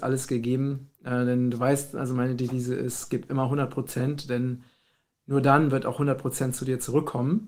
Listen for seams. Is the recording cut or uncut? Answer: uncut